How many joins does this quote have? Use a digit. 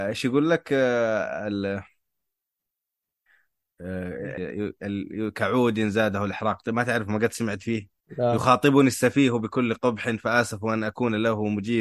2